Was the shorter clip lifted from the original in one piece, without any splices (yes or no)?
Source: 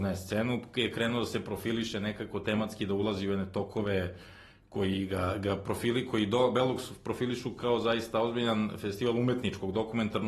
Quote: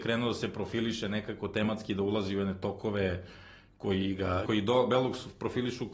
no